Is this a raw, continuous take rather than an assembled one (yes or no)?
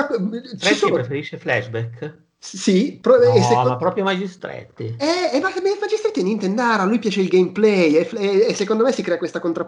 yes